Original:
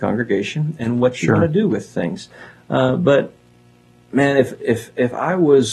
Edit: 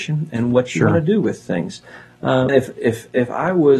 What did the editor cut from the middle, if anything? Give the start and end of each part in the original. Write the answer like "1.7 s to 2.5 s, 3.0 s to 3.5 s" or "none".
3.0 s to 4.3 s